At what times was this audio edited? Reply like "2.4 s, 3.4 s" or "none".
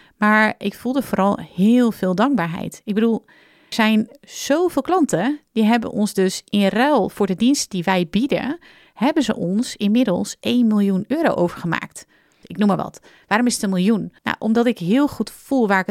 3.7 s, 12.4 s, 14.2 s